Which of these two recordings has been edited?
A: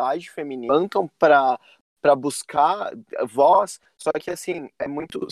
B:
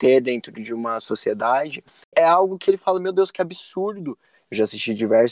B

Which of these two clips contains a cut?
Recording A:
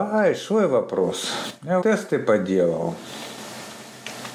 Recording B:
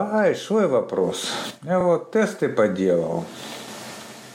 A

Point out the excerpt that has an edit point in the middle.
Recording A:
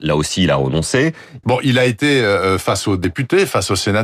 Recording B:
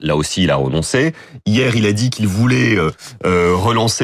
A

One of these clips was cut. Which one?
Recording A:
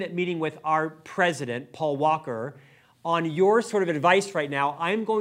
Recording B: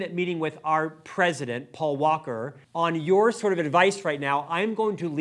B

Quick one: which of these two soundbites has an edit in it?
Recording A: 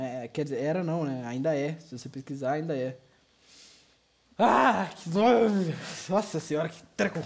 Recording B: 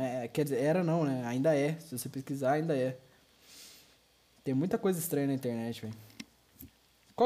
A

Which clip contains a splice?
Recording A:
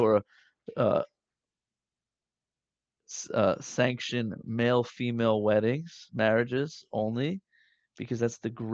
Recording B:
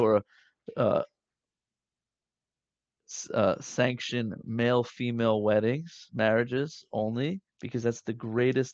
B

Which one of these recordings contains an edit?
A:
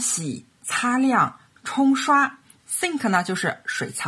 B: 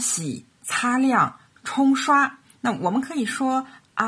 A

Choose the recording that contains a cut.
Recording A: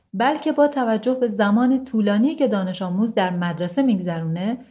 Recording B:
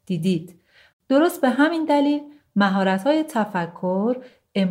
B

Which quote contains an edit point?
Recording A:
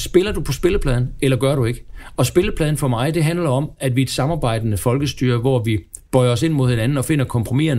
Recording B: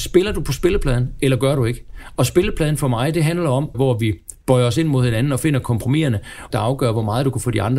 B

